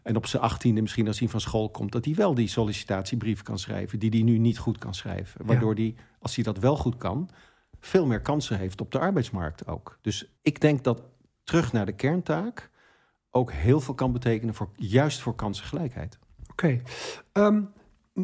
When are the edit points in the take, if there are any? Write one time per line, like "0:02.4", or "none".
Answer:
0:10.4

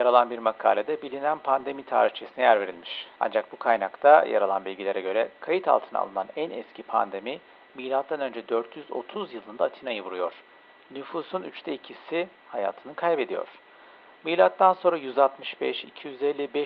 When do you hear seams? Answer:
0:03.2

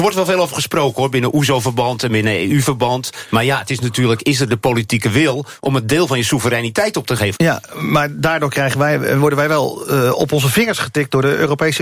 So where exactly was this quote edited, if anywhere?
0:07.3

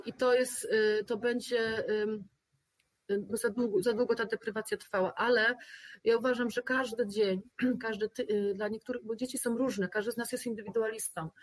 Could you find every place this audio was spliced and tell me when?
0:01.1
0:03.3

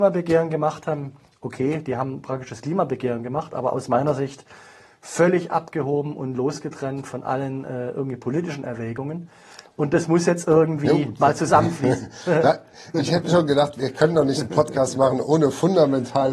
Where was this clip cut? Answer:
none

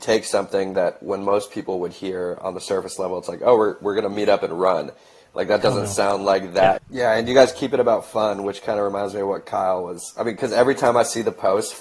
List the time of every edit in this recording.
0:06.8

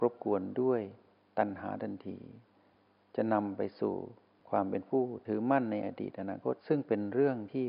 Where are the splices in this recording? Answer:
0:06.6

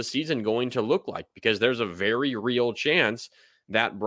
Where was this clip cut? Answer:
none

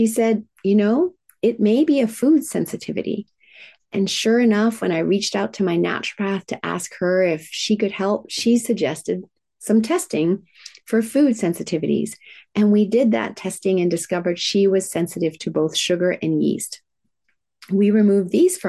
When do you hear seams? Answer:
none

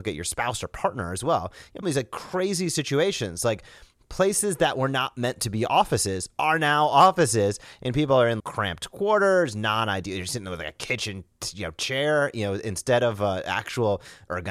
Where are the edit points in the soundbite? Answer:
0:01.8
0:08.4

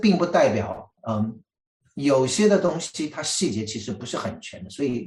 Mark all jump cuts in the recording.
0:01.0

